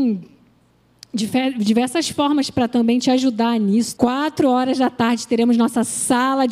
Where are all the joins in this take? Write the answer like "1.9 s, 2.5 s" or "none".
4.0 s